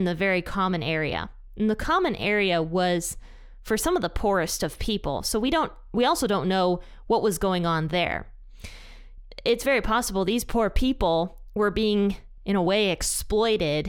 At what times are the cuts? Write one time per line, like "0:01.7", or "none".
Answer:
none